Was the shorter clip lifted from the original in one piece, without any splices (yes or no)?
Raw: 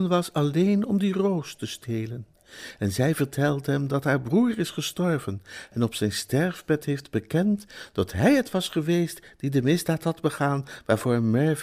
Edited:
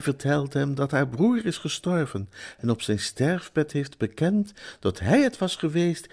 yes